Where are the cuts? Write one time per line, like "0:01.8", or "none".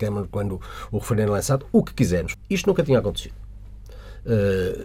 0:02.3